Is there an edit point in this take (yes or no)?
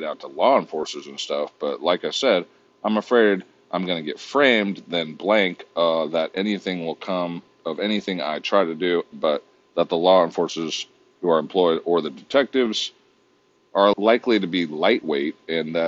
yes